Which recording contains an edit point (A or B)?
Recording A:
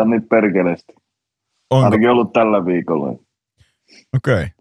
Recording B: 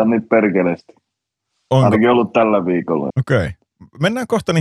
B